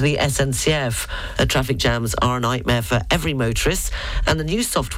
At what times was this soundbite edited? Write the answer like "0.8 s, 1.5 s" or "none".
1.3 s